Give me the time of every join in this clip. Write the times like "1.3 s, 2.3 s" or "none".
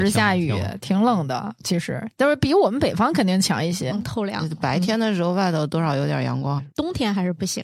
3.9 s, 6.6 s